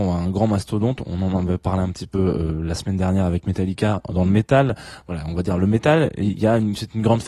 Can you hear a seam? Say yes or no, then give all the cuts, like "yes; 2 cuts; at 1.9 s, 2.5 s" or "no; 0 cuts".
no; 0 cuts